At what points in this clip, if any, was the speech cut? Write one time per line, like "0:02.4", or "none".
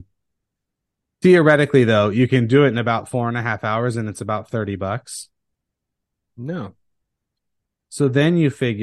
0:06.3